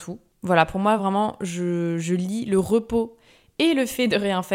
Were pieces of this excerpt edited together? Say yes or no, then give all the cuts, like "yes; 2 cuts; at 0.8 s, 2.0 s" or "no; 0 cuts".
no; 0 cuts